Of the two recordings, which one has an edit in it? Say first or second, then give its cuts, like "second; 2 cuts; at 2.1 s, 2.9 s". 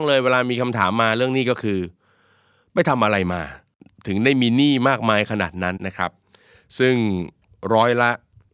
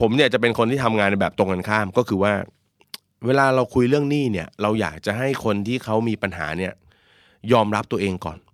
first; 1 cut; at 5.8 s